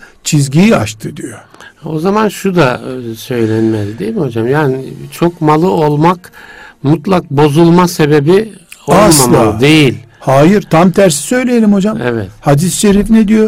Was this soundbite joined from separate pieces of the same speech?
no; 0 cuts

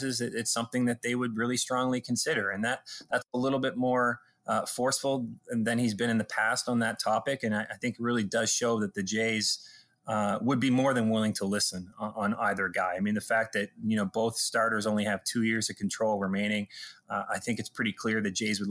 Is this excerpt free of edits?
yes; 0 cuts

